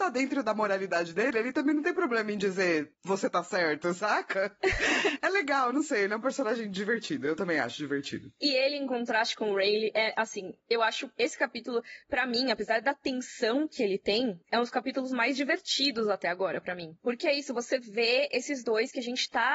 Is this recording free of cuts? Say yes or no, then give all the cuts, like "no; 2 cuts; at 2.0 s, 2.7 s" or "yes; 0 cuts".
yes; 0 cuts